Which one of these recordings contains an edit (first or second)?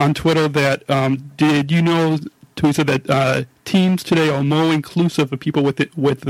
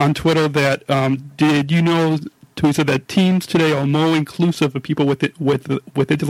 second